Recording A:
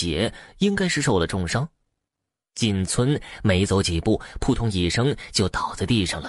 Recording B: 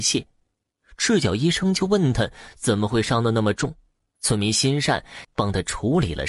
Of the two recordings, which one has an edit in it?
B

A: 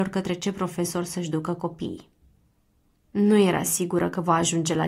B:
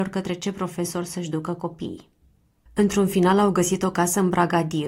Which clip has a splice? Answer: B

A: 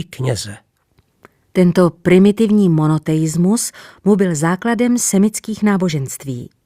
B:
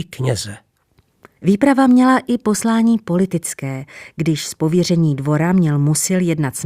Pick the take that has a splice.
B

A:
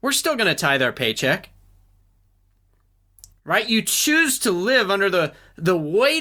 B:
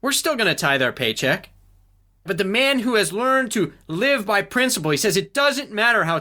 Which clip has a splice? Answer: B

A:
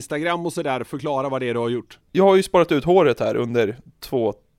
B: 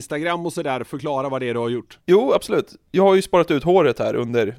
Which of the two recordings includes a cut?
A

